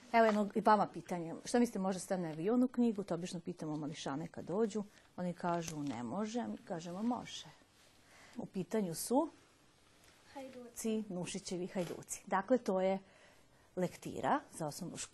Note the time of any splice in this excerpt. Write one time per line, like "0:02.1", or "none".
0:08.3

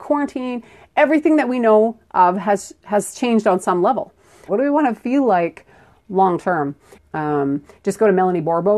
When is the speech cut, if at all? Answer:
0:04.5
0:06.9

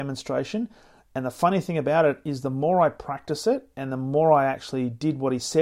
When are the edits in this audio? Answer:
none

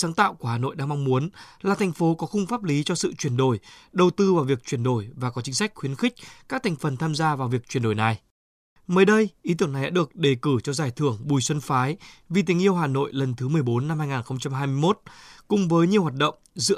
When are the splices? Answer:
0:08.8

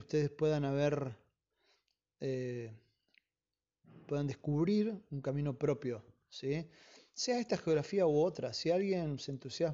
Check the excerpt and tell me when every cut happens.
none

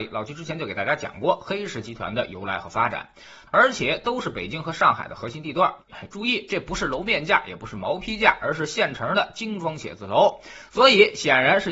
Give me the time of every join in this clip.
0:03.5
0:05.9

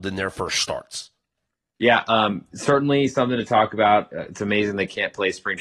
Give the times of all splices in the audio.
none

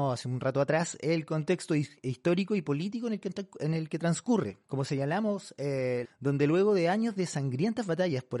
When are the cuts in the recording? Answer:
0:04.6
0:06.0

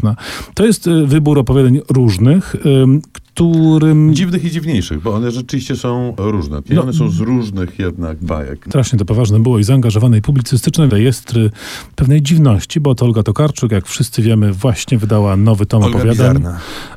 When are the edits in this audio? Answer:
0:06.6
0:08.7
0:10.9

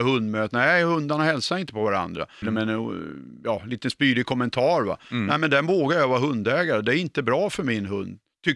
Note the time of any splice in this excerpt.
0:02.4

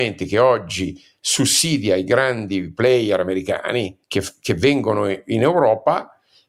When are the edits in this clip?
0:04.0

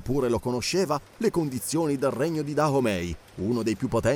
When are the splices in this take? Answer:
none

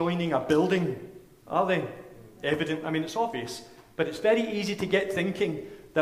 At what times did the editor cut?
none

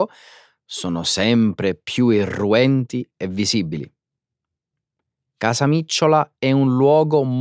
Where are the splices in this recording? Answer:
none

